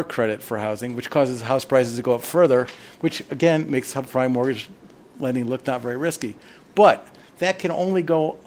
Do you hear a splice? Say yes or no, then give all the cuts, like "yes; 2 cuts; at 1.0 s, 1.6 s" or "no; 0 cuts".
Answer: no; 0 cuts